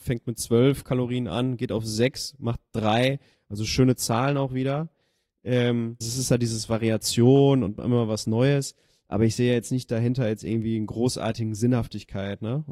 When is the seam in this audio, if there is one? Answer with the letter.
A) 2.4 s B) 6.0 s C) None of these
B